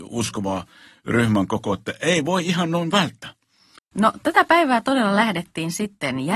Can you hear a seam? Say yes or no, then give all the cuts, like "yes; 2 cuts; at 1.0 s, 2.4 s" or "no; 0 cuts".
yes; 1 cut; at 3.8 s